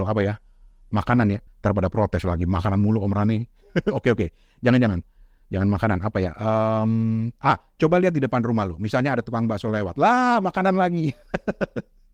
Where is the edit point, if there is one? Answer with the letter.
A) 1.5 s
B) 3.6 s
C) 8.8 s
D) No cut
A